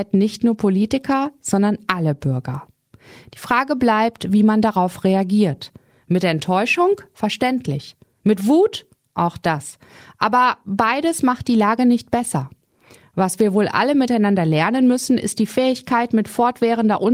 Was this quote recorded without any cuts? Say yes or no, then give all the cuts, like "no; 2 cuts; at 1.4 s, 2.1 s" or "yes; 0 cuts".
yes; 0 cuts